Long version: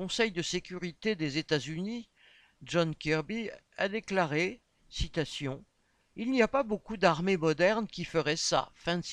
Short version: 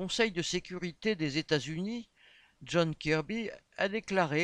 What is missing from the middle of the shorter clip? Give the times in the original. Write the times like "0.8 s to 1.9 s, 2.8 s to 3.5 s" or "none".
none

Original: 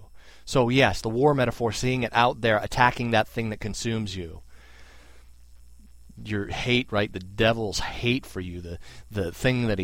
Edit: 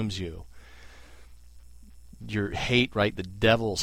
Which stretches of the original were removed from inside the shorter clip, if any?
none

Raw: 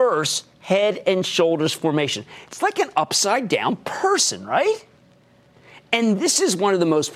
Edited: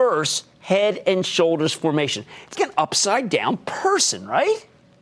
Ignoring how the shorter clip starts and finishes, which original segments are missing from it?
2.5 s to 2.7 s

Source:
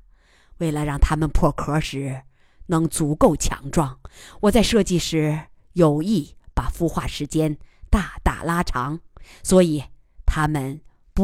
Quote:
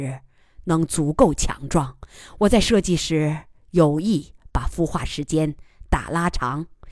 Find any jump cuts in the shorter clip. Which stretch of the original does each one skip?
7.9 s to 8.2 s

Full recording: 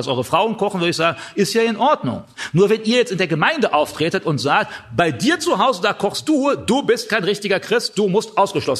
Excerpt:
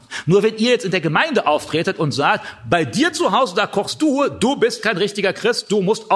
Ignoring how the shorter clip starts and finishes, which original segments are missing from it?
none

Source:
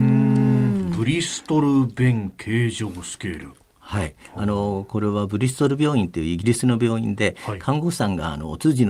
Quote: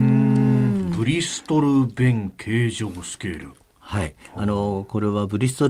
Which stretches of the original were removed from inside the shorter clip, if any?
none

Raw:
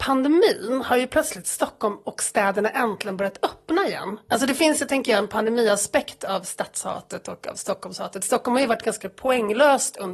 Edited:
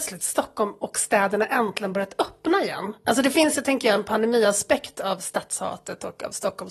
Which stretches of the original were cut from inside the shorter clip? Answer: none

